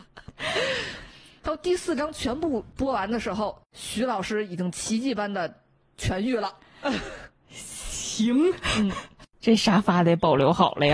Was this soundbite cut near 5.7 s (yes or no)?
no